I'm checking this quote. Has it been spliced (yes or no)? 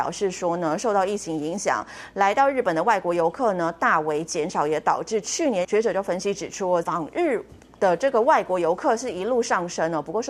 yes